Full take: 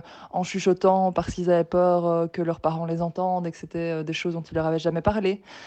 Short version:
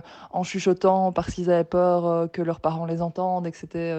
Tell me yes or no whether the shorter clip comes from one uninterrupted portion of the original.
yes